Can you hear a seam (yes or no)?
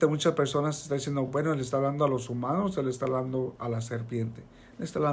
no